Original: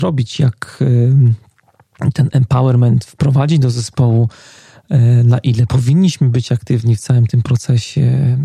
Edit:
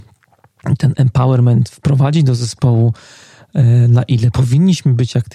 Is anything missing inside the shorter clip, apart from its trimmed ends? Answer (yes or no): no